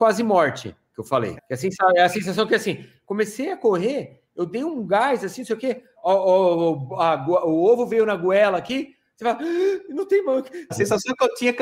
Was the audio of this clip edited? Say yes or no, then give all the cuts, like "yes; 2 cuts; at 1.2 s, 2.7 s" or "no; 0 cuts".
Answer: yes; 2 cuts; at 1.4 s, 10.7 s